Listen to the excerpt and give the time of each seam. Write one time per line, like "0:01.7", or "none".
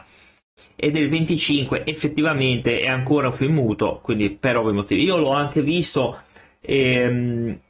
none

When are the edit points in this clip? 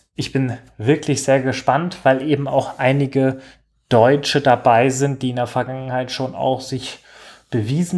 none

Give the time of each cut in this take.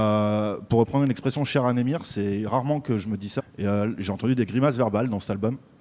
0:03.4

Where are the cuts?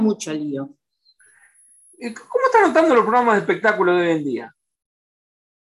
none

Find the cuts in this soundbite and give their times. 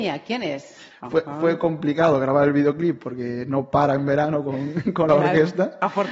0:00.9

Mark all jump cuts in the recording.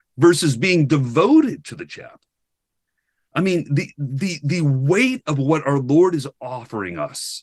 none

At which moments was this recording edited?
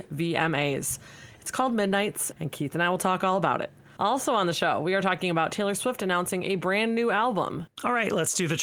0:02.3
0:04.0
0:07.7

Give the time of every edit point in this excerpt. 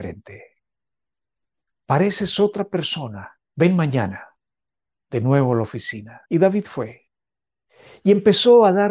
0:03.4
0:06.3

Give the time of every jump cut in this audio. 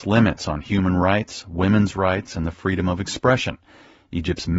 none

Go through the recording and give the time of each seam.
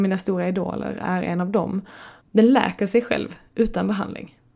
0:02.2

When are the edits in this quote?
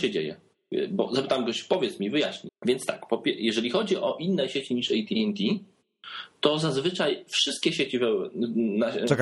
0:02.5

